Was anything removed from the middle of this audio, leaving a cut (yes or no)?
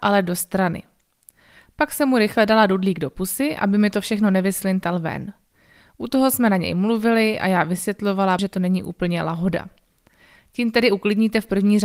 yes